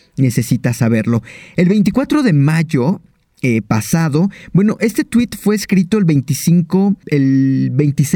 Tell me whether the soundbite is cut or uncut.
uncut